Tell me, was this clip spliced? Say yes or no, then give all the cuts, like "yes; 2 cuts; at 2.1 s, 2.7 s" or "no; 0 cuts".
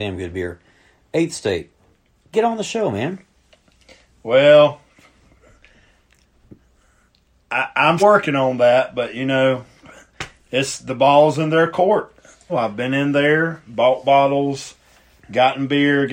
yes; 2 cuts; at 8.0 s, 12.5 s